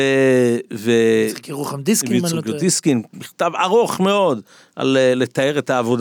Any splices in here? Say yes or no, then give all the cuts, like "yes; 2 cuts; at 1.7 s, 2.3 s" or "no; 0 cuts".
no; 0 cuts